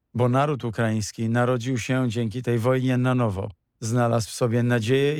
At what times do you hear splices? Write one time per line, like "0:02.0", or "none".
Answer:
0:03.7